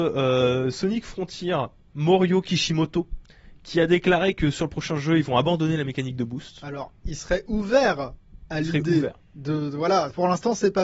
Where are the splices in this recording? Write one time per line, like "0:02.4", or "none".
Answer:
none